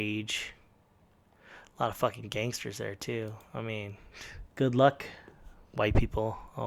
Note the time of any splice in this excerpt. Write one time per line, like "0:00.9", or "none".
0:04.5